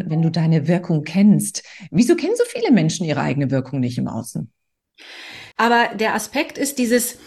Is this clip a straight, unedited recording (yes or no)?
no